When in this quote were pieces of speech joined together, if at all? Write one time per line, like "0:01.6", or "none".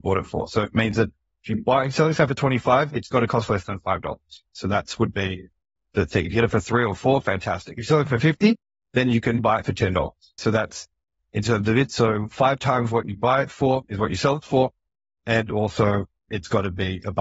none